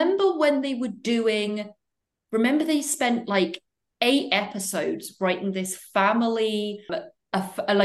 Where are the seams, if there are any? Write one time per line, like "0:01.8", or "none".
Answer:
0:06.9